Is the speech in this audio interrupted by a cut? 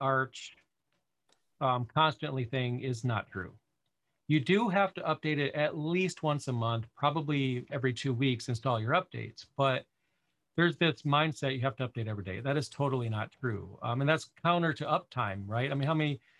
yes; 1 cut; at 7.7 s

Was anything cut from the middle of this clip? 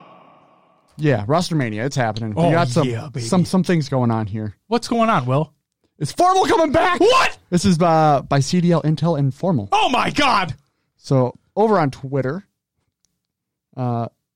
no; 0 cuts

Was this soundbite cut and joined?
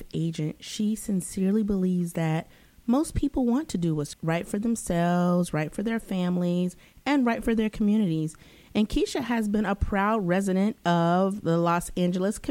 yes; 1 cut; at 4.1 s

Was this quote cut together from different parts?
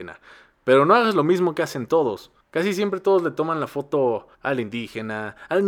yes; 2 cuts; at 2.4 s, 4.3 s

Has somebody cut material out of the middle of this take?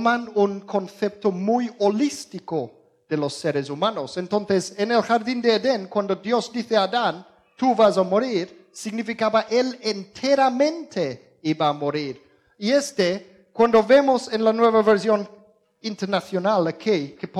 no; 0 cuts

